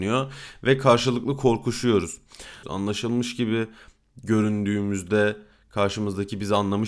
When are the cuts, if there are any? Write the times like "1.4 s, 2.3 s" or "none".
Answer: 2.6 s